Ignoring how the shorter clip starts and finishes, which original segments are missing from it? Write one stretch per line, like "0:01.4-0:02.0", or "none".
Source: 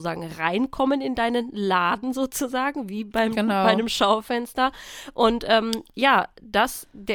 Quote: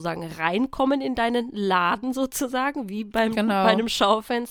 none